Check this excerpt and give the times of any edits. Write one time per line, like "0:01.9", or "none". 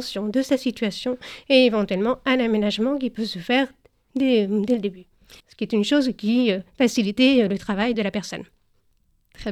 0:05.4
0:07.9

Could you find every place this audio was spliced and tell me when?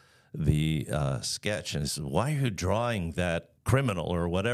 0:03.6

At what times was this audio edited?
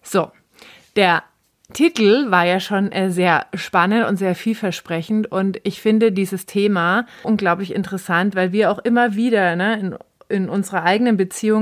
0:07.2

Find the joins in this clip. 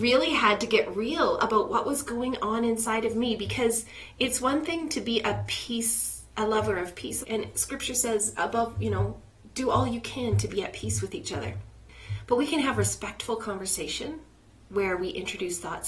0:07.2

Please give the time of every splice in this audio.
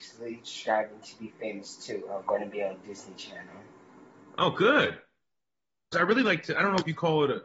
0:05.9

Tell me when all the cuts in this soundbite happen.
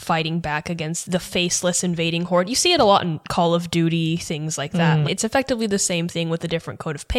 0:05.0

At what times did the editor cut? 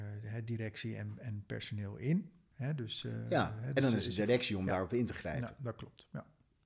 none

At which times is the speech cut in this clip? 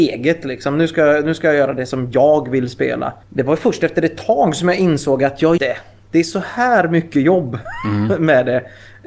0:03.2
0:05.6

